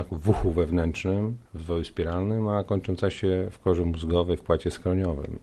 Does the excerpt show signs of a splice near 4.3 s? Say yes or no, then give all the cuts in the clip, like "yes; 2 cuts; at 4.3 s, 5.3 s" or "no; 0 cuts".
no; 1 cut; at 1.5 s